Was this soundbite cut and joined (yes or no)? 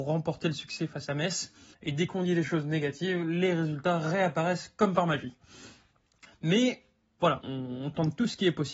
yes